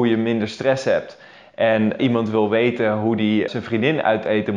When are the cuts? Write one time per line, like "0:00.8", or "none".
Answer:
0:02.0
0:03.5